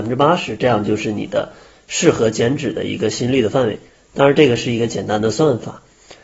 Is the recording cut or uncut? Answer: uncut